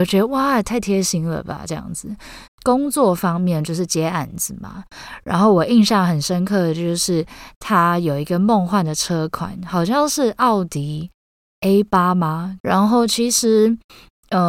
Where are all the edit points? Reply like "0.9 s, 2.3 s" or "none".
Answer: 2.5 s, 12.6 s